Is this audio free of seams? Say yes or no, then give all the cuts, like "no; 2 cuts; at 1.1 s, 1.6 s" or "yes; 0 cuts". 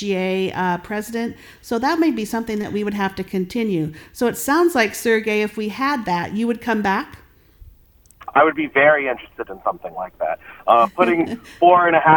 yes; 0 cuts